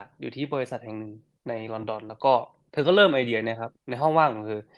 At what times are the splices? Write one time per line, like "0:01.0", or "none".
none